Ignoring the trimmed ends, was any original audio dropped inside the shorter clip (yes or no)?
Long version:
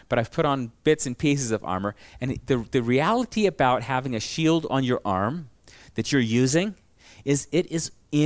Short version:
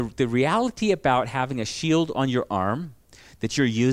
no